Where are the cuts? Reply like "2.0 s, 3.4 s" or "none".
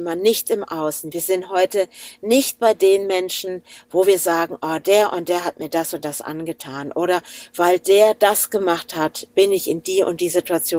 none